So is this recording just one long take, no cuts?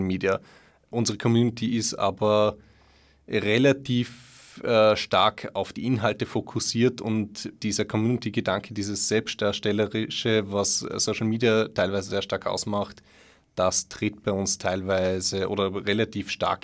yes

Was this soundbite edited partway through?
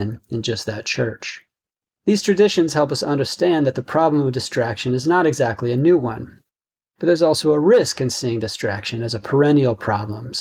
no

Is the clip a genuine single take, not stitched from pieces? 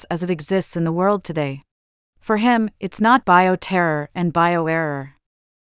no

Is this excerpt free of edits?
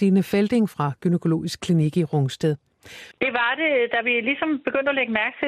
no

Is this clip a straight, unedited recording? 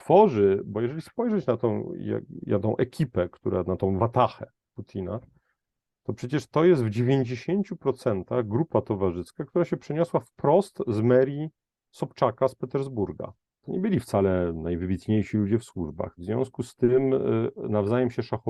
no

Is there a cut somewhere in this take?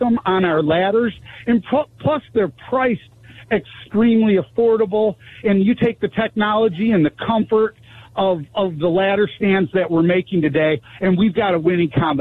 no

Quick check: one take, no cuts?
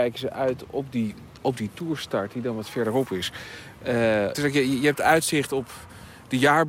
no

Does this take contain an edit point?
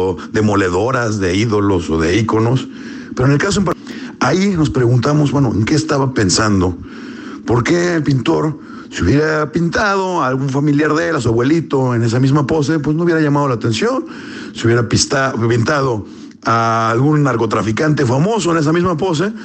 no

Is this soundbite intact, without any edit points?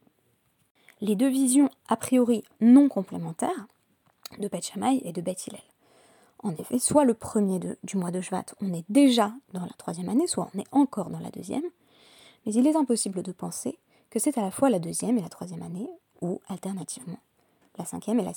yes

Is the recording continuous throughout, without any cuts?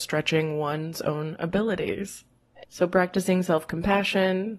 no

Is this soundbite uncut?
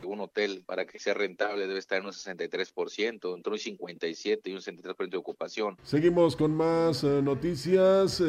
no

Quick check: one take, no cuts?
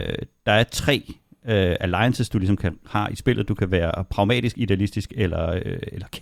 yes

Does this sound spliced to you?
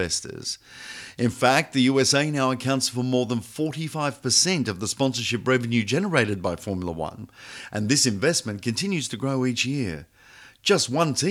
no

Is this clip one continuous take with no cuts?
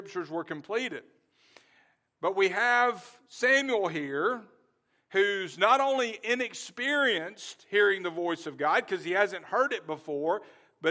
yes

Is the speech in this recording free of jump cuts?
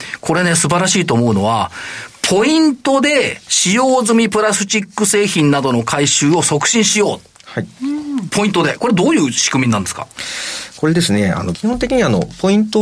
no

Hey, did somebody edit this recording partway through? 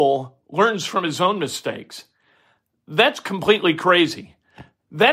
no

